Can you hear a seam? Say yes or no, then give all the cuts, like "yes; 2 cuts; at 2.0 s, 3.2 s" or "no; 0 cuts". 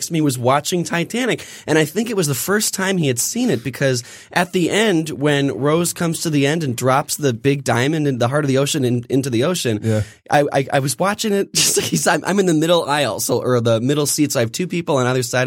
no; 0 cuts